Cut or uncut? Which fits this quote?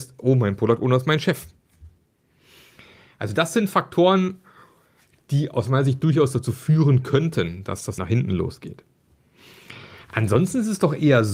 cut